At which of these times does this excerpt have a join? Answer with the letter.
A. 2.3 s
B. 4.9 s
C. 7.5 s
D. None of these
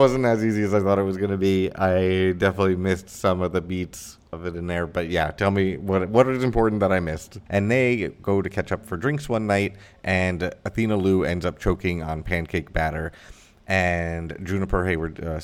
C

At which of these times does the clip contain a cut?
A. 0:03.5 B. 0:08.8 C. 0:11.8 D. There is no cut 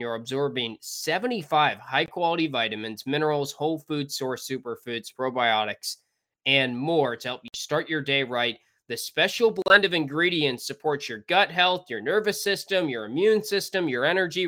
D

